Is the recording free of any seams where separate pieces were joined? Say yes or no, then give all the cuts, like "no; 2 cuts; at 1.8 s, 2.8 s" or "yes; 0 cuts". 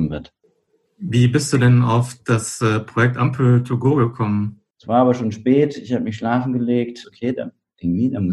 no; 2 cuts; at 4.7 s, 7.0 s